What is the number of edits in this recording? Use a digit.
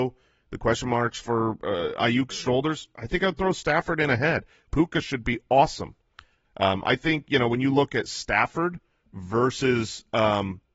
2